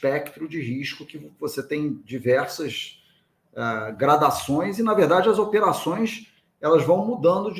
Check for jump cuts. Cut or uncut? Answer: uncut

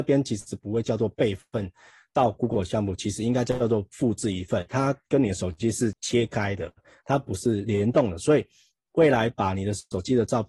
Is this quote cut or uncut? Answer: cut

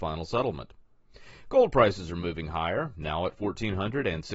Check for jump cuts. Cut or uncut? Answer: uncut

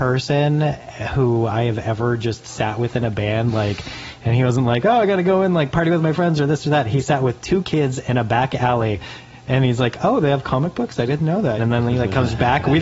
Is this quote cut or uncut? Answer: cut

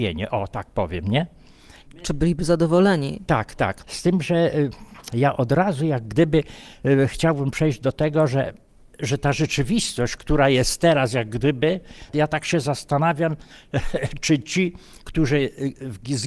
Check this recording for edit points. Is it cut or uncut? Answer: cut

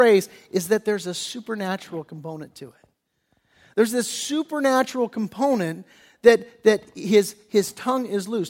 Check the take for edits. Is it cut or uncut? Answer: uncut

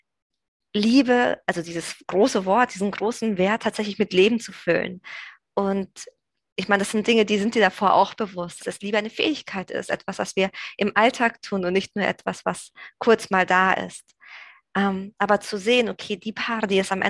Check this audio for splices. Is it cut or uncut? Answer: cut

